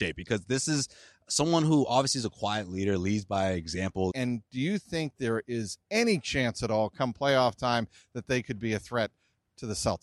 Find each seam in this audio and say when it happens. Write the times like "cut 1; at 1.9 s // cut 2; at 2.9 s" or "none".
cut 1; at 4.1 s